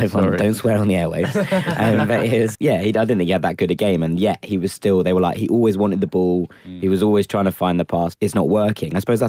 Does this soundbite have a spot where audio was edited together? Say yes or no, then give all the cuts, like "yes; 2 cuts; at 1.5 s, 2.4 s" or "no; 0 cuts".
yes; 2 cuts; at 2.5 s, 8.1 s